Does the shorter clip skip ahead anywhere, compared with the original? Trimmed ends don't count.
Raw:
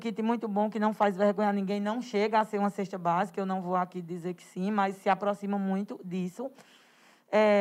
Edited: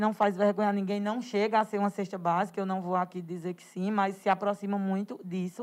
no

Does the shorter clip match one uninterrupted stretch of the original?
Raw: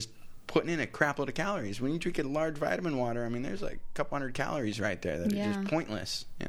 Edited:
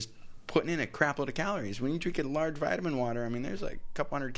yes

